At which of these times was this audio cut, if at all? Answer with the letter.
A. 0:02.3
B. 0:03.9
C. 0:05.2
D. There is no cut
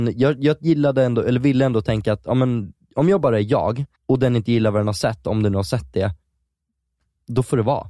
B